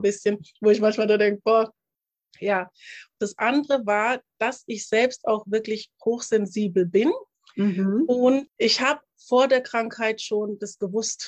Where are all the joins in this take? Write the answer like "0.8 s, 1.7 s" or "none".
3.1 s